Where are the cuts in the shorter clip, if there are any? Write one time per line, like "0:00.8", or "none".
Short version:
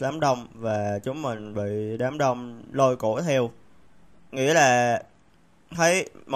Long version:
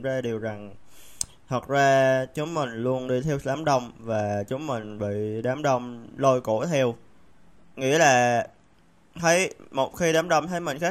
none